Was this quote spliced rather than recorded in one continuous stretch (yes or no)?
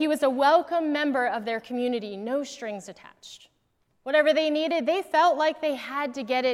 yes